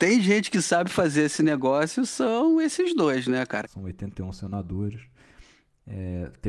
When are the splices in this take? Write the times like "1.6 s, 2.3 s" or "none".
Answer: 3.6 s